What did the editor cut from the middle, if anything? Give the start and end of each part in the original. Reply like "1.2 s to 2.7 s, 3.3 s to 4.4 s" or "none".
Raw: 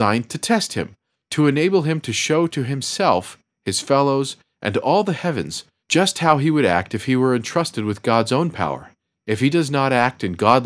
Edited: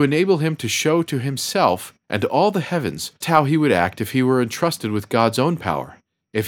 3.5 s to 4.6 s, 5.7 s to 6.1 s